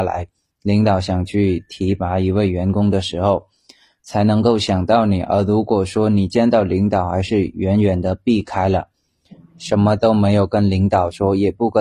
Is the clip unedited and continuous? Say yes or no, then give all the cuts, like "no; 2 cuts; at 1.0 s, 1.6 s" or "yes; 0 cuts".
yes; 0 cuts